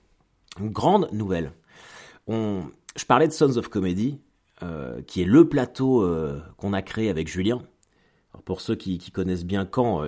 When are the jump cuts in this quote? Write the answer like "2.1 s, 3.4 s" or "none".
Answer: none